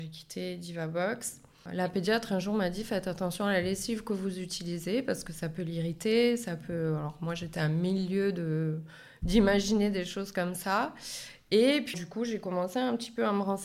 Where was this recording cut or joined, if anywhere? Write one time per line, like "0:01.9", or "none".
0:01.7
0:11.9